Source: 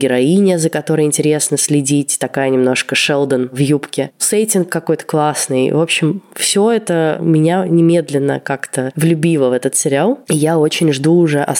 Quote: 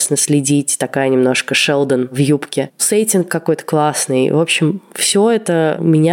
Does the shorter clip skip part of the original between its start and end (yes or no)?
no